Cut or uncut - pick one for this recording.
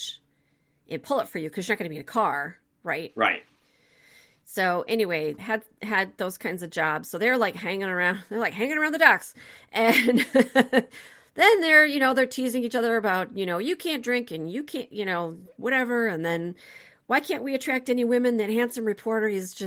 cut